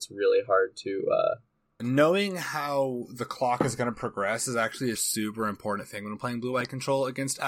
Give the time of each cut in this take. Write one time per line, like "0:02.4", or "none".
0:01.8
0:04.9